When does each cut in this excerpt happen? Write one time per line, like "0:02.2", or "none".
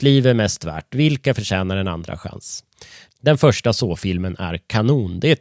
0:03.1